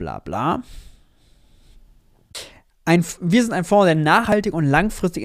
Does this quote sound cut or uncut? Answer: uncut